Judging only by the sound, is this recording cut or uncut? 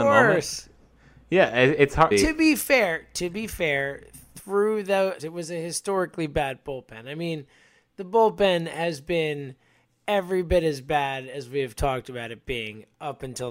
cut